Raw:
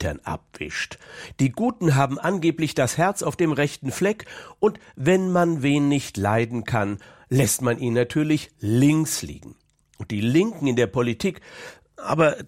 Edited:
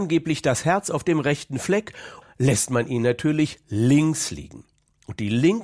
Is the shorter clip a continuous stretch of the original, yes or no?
no